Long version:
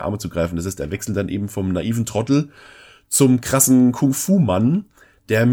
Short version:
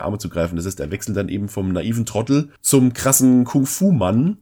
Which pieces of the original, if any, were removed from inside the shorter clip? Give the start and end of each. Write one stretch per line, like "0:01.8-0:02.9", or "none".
0:02.6-0:03.0